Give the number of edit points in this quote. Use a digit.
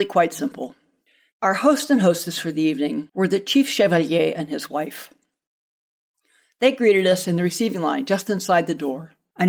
1